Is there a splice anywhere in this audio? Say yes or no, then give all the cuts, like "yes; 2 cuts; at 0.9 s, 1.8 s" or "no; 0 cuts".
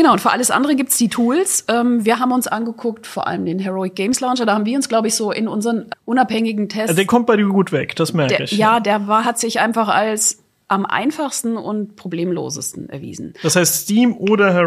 yes; 1 cut; at 5.9 s